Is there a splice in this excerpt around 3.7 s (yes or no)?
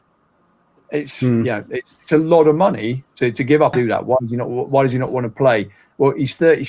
yes